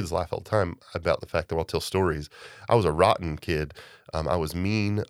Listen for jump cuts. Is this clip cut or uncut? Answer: uncut